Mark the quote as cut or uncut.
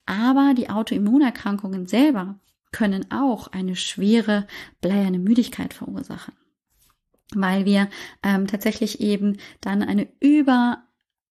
uncut